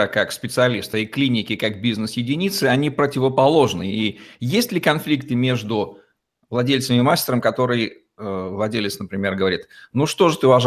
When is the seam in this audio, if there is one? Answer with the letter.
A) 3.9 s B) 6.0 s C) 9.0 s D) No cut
D